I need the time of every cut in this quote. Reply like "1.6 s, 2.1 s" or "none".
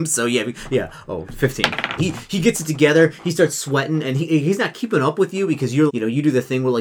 2.0 s, 5.9 s